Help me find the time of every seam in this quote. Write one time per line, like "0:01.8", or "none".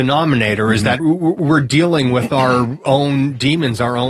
0:01.0